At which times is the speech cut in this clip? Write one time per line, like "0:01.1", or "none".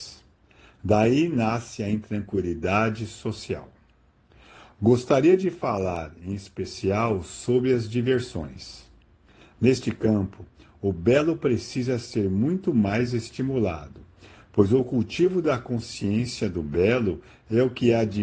none